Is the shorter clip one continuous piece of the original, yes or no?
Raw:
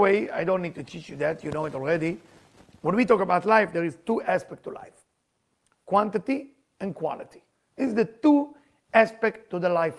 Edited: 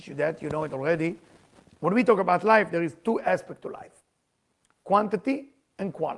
yes